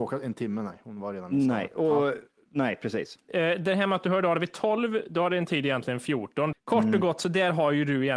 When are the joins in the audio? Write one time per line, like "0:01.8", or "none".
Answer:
0:03.3
0:06.5